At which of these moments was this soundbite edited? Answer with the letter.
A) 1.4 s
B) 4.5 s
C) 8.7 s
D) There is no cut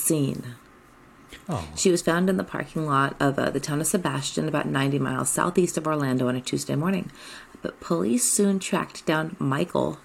A